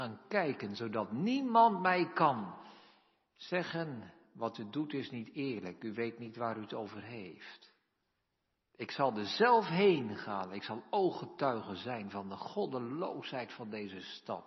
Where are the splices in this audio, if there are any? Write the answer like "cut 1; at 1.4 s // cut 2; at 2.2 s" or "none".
none